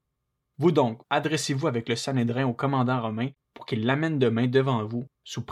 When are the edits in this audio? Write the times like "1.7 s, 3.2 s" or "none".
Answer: 1.0 s

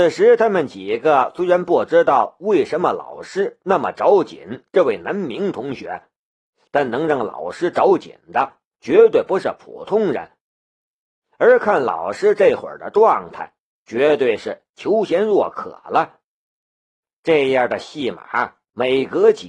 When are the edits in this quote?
none

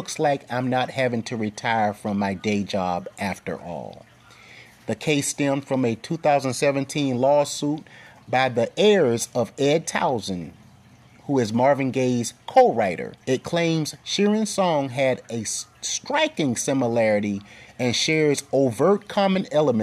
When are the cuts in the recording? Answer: 4.7 s, 13.2 s

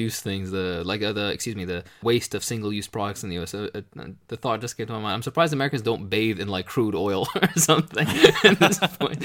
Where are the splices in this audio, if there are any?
2.0 s

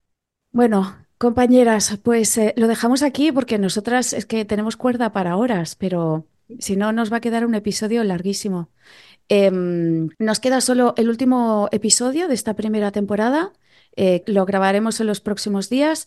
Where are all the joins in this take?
10.1 s, 14.2 s

